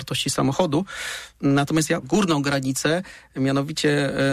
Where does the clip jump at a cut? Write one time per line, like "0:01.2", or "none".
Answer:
0:02.0